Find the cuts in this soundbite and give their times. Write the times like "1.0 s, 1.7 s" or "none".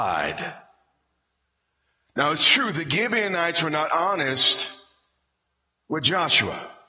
none

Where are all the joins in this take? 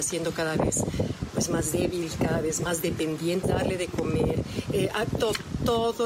3.4 s

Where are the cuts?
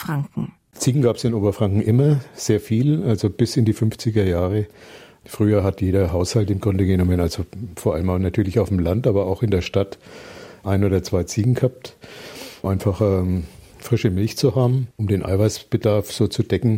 12.6 s, 14.9 s

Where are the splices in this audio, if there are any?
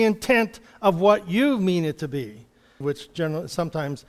2.8 s

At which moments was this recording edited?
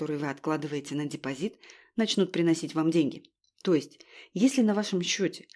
3.5 s

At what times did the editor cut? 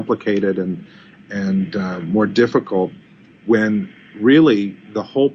none

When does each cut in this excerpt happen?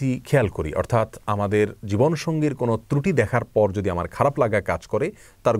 none

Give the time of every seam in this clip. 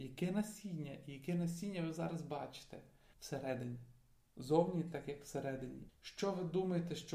3.1 s, 5.9 s

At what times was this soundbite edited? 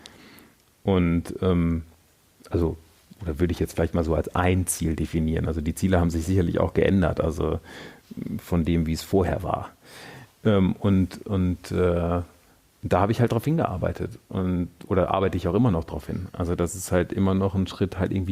none

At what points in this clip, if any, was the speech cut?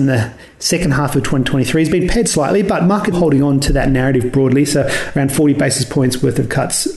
3.1 s

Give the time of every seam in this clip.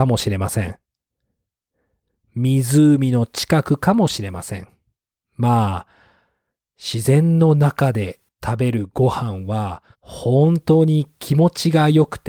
5.2 s, 9.9 s

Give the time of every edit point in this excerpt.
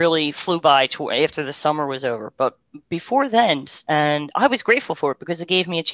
3.8 s

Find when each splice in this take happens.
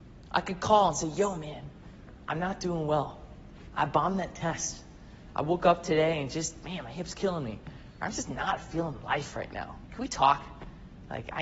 none

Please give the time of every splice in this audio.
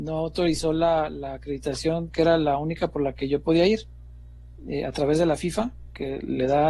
none

